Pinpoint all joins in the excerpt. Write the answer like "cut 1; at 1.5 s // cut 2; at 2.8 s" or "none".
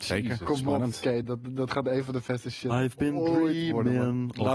none

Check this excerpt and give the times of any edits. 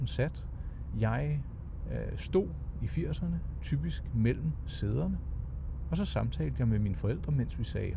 cut 1; at 0.9 s

